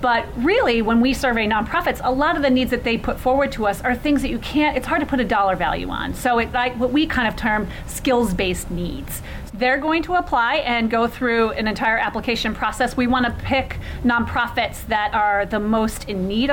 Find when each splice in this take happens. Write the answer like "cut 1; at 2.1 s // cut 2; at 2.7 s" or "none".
cut 1; at 6.5 s // cut 2; at 9.5 s // cut 3; at 13.1 s